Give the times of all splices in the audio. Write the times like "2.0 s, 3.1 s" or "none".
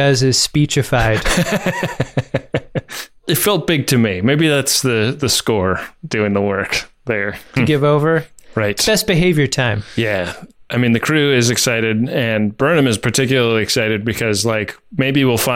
7.6 s